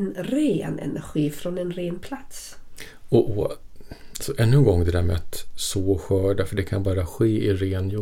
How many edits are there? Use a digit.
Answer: 1